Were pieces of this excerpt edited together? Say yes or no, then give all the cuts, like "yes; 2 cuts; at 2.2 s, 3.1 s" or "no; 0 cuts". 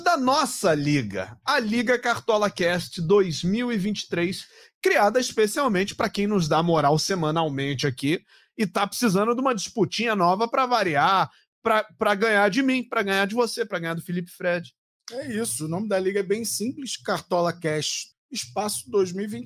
yes; 1 cut; at 18.1 s